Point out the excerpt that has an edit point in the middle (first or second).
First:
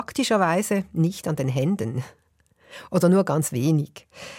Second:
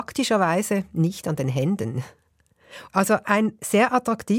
second